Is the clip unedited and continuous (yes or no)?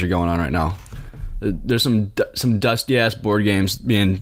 yes